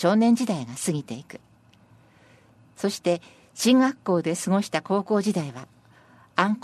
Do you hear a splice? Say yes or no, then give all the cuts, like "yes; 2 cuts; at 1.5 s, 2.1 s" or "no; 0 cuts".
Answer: no; 0 cuts